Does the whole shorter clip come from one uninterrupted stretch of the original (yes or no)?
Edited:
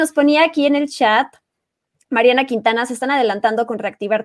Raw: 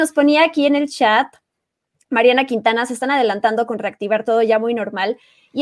yes